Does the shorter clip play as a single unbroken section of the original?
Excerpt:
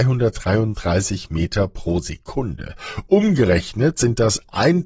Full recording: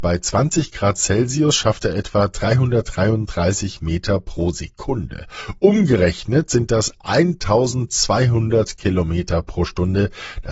yes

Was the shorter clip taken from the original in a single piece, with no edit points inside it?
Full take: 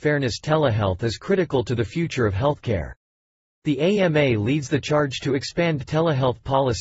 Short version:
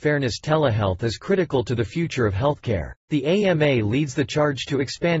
no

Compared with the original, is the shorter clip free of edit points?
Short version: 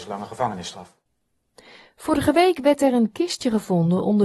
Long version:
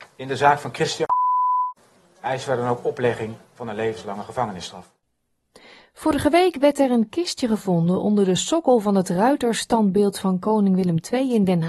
yes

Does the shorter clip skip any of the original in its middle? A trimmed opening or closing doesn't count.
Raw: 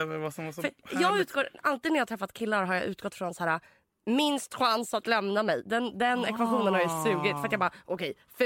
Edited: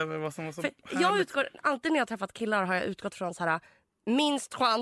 no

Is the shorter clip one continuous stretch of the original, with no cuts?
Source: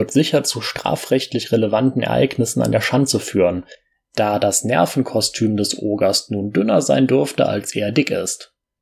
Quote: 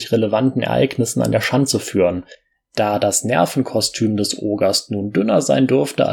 yes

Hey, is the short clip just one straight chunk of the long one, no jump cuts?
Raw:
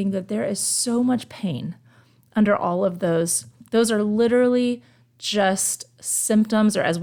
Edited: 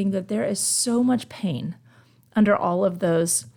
yes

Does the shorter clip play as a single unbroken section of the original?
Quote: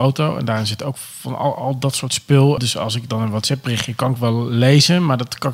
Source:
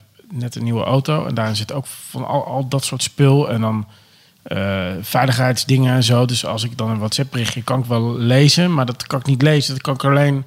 no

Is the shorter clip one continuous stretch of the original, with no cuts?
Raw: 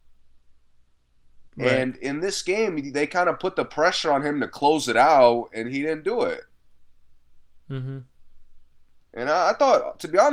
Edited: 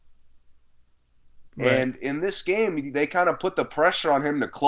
yes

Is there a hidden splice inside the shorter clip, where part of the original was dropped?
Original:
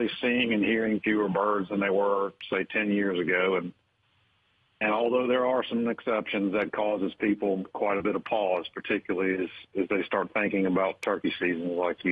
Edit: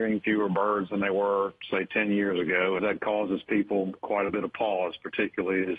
yes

